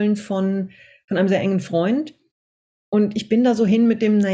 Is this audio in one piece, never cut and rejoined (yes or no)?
yes